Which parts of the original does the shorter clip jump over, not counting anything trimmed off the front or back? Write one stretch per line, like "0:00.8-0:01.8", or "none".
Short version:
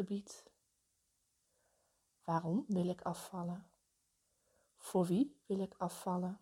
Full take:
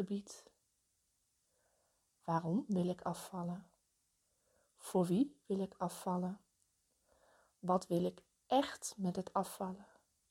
none